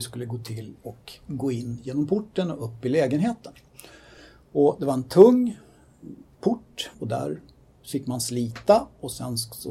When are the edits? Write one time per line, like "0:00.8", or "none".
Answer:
0:06.9